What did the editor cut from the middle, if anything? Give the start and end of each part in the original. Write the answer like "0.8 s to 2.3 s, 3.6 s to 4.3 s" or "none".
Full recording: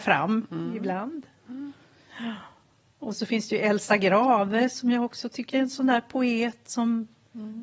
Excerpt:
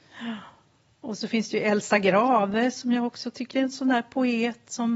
none